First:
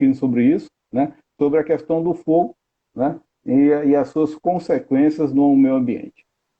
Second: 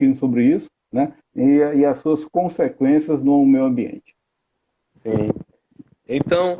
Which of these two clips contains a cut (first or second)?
second